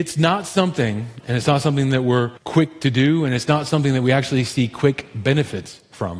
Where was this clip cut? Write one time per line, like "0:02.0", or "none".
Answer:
0:01.2
0:02.4